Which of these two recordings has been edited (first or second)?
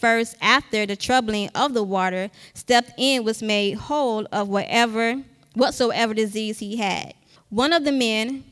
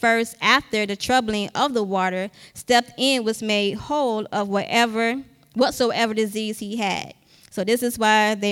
first